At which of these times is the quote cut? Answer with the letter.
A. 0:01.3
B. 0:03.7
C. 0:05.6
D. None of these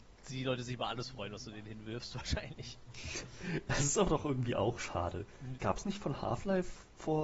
C